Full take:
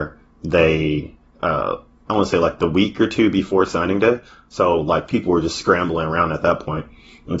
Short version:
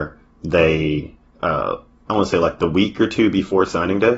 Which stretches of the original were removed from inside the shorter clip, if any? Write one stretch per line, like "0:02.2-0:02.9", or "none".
none